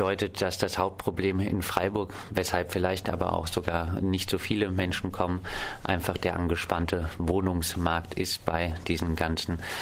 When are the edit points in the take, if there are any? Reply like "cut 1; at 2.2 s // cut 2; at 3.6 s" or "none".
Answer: none